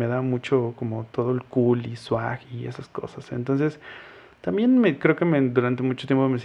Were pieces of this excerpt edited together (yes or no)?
no